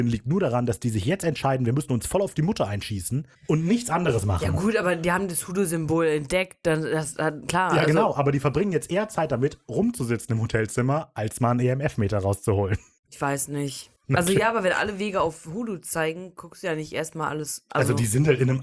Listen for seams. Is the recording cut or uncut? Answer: uncut